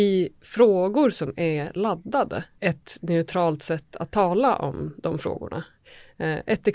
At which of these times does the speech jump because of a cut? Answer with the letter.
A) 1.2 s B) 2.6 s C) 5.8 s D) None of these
B